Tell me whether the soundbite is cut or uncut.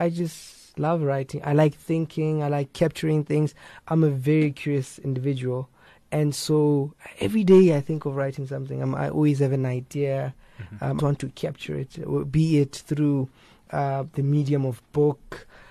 cut